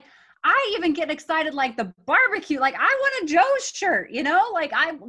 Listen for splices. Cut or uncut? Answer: uncut